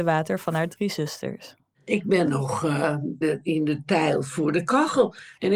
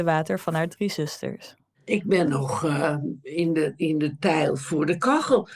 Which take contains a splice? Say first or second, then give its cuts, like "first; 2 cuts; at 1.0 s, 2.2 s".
first; 1 cut; at 3.2 s